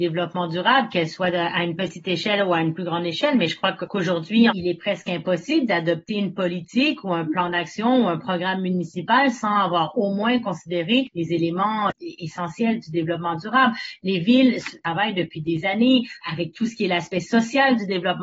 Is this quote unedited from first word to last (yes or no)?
no